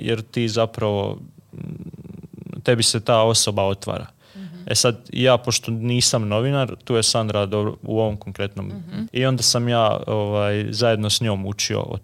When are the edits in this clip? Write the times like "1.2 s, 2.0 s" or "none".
9.1 s